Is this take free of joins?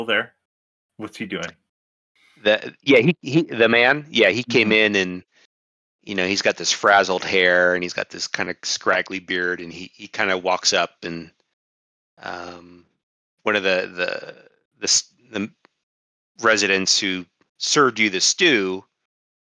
yes; 0 cuts

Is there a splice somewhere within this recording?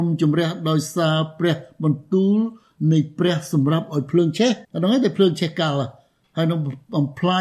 yes; 1 cut; at 4.6 s

